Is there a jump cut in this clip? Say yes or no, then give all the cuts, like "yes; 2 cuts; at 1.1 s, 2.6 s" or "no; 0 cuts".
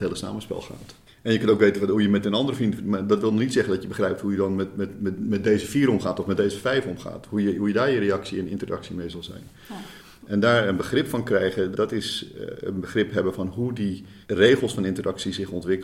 yes; 3 cuts; at 1.1 s, 11.7 s, 14.2 s